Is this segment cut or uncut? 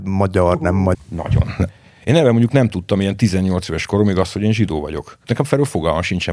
cut